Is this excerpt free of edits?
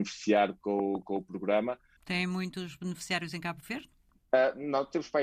no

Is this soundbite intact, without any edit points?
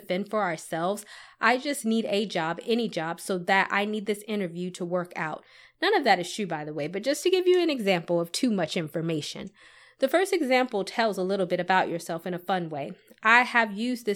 yes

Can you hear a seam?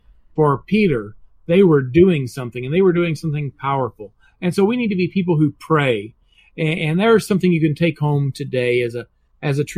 no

